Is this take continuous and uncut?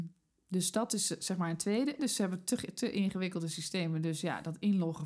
no; 1 cut; at 2.0 s

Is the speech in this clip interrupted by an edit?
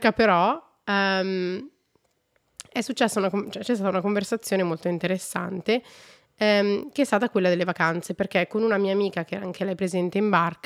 no; 0 cuts

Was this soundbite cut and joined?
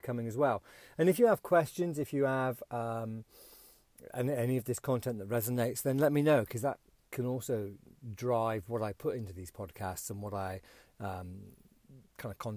no; 0 cuts

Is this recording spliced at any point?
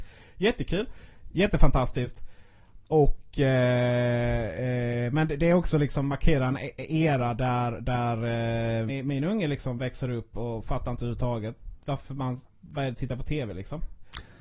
yes; 1 cut; at 8.9 s

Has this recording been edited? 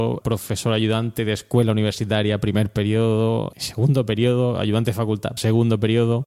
yes; 1 cut; at 5.4 s

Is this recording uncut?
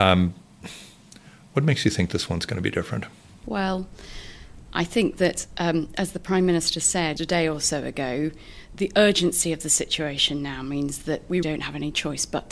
no; 2 cuts; at 7.2 s, 11.4 s

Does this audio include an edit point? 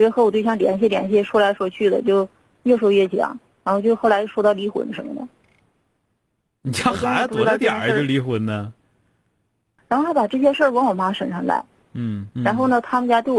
yes; 2 cuts; at 9.8 s, 12.3 s

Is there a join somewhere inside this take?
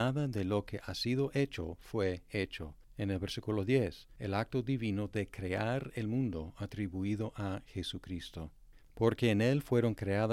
yes; 2 cuts; at 4.2 s, 8.8 s

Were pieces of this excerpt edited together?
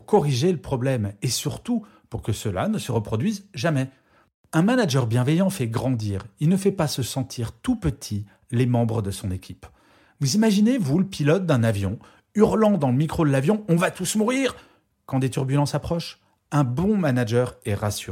no; 0 cuts

